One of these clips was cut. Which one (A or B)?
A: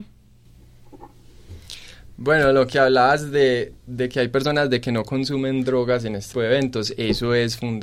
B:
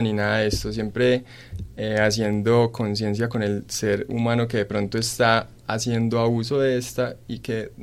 A